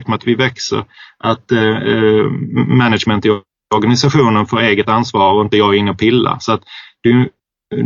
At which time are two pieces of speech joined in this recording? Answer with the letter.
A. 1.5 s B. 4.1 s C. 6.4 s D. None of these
D